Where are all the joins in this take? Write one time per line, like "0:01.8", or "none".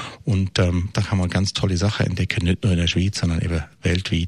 0:00.9